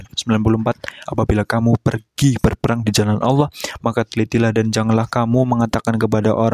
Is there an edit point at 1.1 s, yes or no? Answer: yes